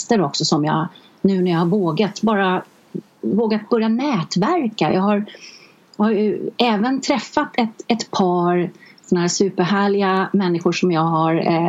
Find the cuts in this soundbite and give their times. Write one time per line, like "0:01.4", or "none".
none